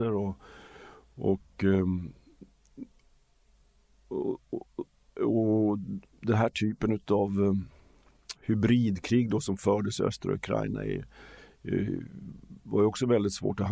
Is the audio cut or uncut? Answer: uncut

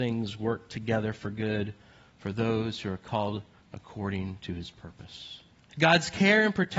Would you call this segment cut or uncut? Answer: cut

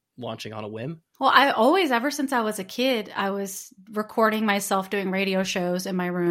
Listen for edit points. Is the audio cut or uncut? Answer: uncut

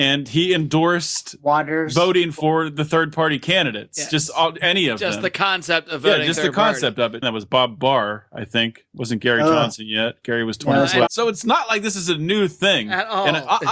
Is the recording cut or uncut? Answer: cut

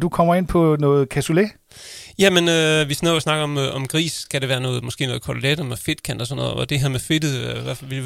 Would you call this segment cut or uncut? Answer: uncut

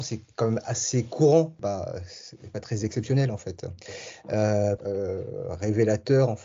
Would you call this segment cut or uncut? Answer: cut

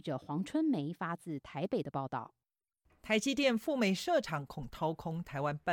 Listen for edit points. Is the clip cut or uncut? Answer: uncut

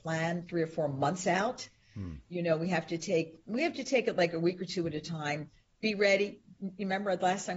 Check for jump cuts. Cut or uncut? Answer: uncut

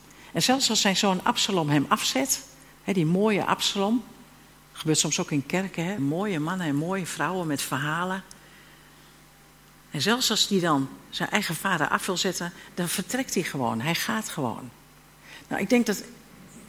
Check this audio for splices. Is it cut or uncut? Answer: cut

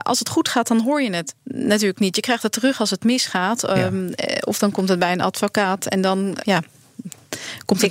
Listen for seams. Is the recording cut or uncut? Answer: cut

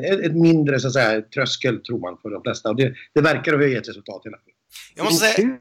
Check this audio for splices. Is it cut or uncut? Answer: uncut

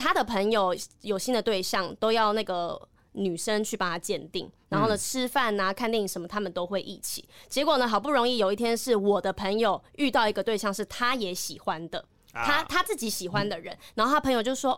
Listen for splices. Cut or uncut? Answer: uncut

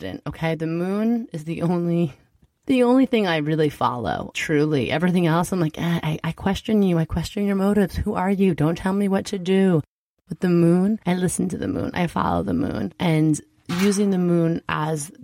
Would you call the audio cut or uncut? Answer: uncut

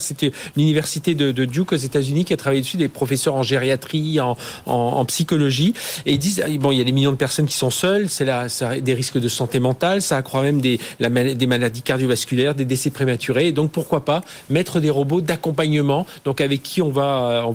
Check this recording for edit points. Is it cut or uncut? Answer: uncut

